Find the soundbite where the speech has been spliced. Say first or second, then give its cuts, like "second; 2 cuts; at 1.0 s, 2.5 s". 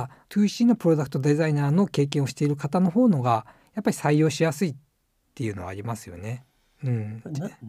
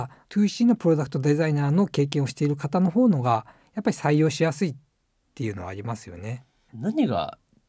second; 1 cut; at 6.7 s